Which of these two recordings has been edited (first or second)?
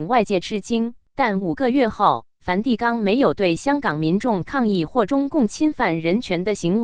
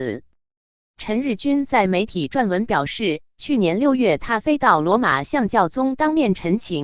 first